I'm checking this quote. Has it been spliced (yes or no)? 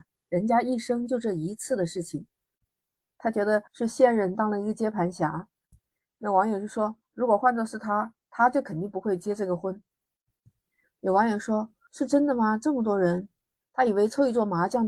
no